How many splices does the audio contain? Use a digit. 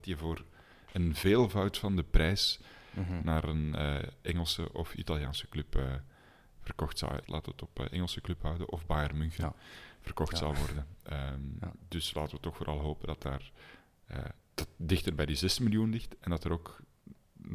1